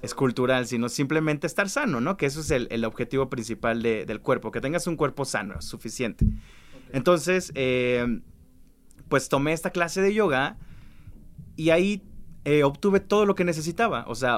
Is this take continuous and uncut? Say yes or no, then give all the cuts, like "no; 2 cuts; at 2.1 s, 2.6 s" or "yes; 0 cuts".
yes; 0 cuts